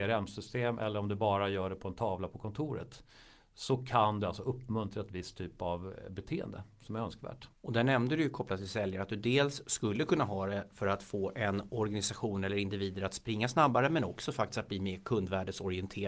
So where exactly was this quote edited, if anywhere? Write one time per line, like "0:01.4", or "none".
0:07.5